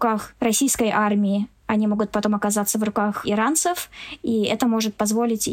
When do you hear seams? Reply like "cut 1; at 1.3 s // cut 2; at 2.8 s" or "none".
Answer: none